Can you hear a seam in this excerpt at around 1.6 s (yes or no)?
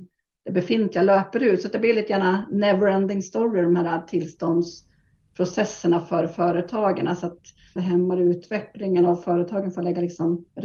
no